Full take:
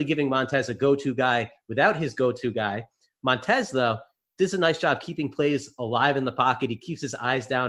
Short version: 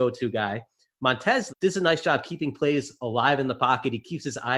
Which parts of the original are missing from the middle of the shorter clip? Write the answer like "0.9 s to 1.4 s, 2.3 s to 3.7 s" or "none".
3.7 s to 4.3 s